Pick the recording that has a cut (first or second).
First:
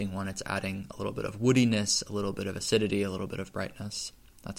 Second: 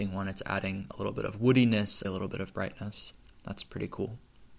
second